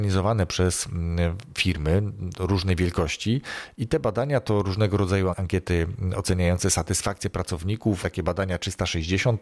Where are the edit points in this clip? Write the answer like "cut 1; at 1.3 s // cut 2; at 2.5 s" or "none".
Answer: cut 1; at 5.3 s // cut 2; at 8.0 s